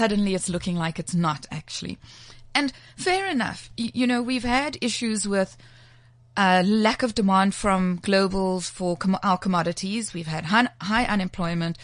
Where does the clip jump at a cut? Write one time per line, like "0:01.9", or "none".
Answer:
none